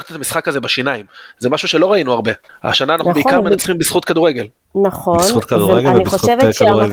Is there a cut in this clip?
no; 0 cuts

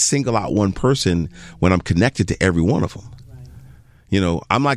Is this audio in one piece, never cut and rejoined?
yes; 0 cuts

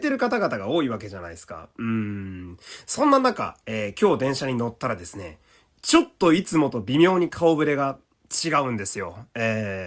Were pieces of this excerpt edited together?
no; 0 cuts

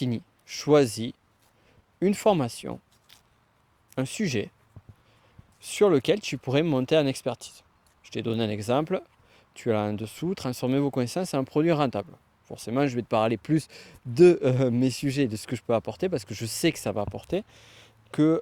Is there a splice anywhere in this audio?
no; 0 cuts

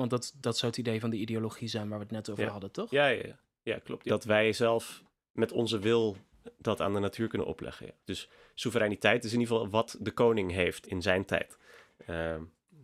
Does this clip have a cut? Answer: yes; 3 cuts; at 4.1 s, 8.0 s, 10.8 s

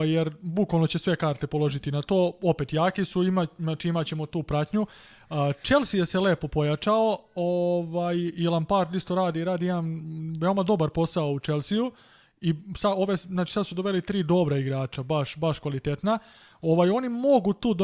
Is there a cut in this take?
no; 0 cuts

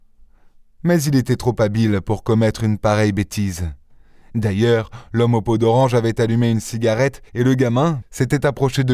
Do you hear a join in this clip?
yes; 1 cut; at 8.0 s

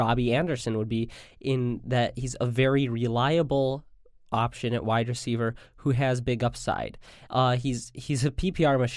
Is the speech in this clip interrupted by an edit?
no; 0 cuts

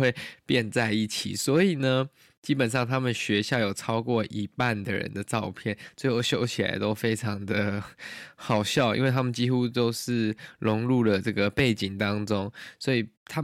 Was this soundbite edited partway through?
no; 0 cuts

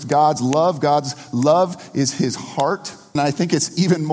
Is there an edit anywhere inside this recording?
yes; 1 cut; at 3.2 s

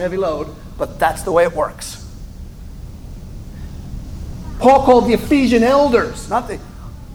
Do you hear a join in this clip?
no; 0 cuts

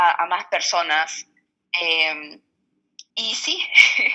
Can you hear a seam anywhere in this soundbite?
yes; 1 cut; at 3.1 s

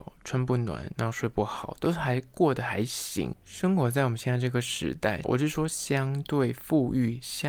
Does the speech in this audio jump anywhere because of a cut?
yes; 2 cuts; at 3.3 s, 5.2 s

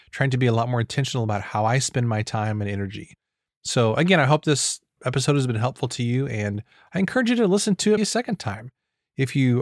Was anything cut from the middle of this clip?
yes; 2 cuts; at 5.0 s, 8.0 s

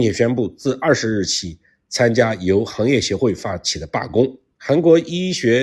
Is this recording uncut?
no; 1 cut; at 4.6 s

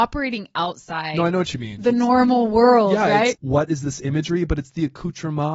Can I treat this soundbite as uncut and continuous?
no; 1 cut; at 3.3 s

